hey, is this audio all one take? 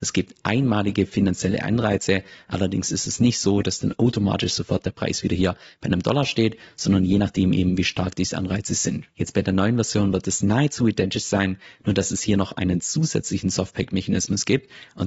yes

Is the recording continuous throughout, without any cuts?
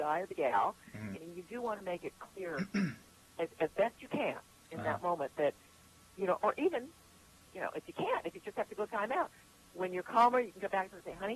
no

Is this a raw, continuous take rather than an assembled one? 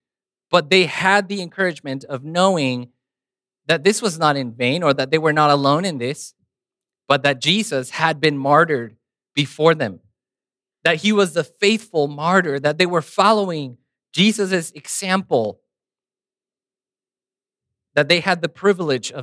yes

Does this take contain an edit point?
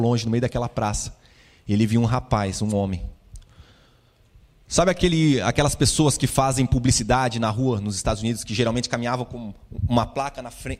no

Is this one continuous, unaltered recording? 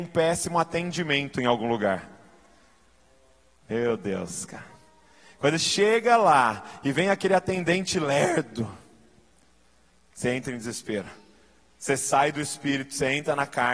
yes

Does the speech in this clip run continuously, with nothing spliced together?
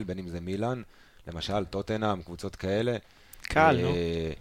yes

